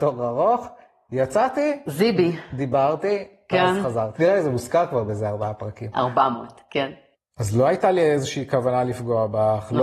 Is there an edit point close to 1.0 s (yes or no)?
no